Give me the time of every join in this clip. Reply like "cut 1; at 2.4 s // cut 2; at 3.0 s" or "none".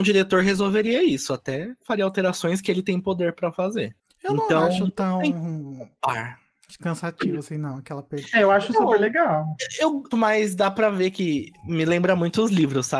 cut 1; at 10.1 s